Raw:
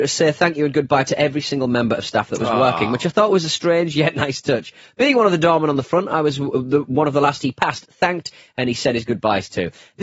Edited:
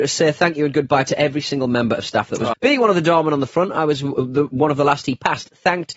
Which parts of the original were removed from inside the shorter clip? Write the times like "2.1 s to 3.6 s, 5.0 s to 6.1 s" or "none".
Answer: 2.5 s to 4.9 s